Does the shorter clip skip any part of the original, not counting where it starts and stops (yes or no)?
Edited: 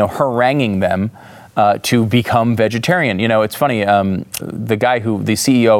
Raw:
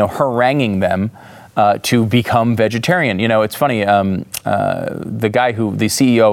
yes